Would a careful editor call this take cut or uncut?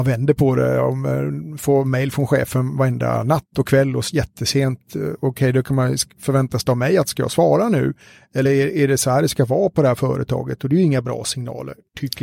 uncut